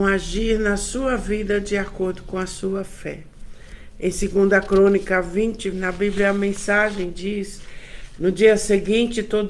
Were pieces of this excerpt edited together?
yes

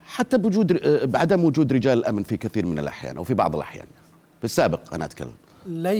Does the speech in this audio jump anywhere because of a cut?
no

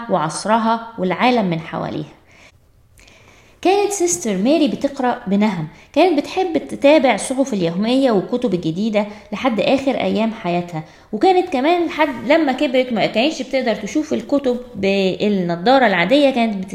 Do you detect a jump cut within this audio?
no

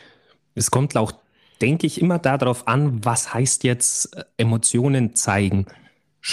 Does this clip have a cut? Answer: no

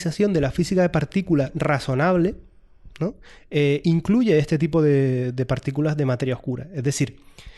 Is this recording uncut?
yes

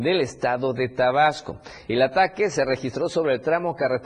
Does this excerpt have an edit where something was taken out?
no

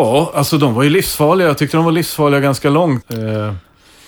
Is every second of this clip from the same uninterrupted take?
no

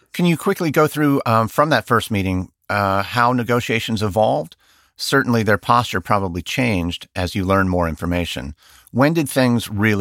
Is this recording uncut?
yes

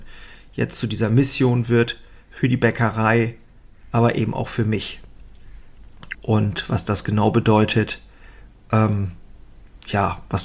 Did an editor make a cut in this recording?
yes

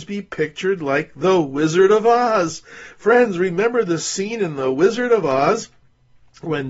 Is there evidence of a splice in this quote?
no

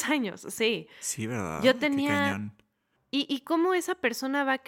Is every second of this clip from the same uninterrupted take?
no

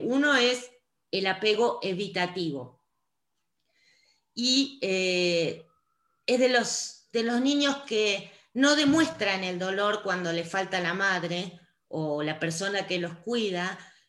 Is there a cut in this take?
no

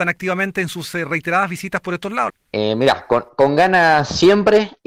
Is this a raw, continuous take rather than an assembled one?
no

